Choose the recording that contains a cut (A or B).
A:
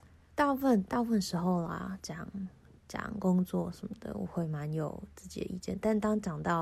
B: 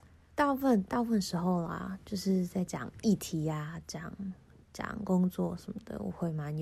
A